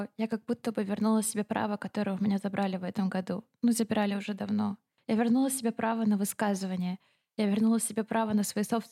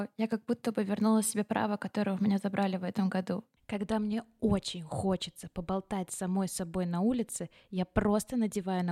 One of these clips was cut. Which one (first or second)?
second